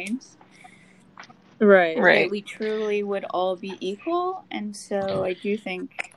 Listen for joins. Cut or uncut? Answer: uncut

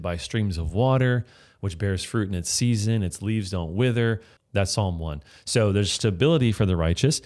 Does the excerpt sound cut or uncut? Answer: cut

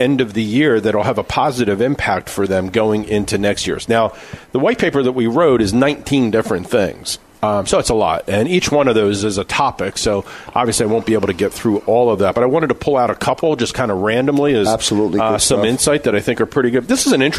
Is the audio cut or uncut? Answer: uncut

